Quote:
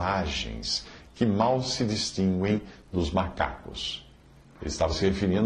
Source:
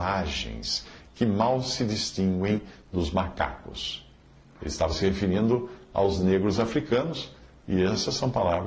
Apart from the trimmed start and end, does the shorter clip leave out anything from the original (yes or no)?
no